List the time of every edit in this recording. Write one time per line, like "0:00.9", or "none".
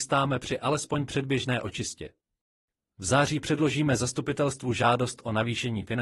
none